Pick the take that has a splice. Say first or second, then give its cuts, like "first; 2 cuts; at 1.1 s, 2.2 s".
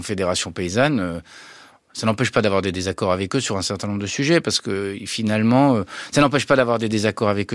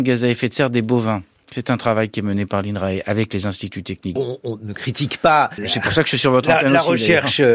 second; 2 cuts; at 4.2 s, 5.6 s